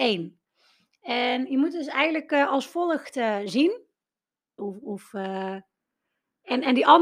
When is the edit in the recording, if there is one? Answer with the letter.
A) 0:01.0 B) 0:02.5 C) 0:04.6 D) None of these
C